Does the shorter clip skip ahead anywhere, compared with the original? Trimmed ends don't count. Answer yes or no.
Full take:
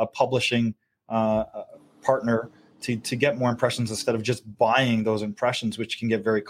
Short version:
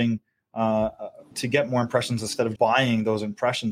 yes